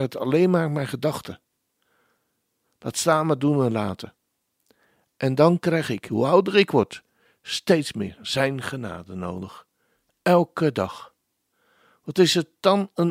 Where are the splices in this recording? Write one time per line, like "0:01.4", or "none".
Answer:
none